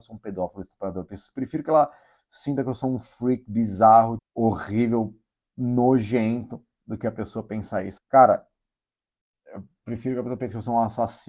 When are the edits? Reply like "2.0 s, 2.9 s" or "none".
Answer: 4.2 s, 8.0 s